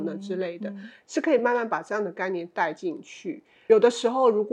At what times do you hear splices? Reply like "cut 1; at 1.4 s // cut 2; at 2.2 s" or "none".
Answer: none